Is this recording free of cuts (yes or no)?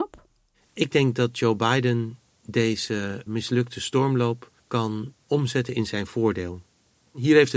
no